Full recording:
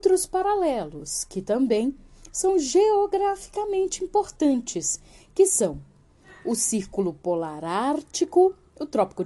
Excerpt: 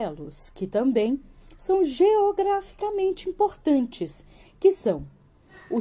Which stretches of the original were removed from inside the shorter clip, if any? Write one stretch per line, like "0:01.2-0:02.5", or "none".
none